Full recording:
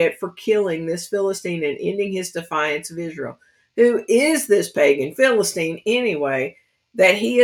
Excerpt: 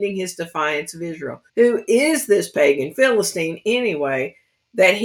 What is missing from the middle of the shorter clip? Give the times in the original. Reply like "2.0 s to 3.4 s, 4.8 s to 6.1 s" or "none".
3.4 s to 3.7 s